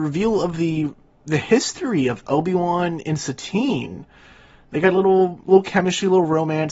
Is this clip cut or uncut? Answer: uncut